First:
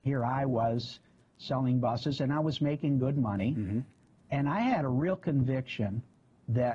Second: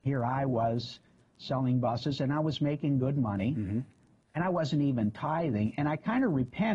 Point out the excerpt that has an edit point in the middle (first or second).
first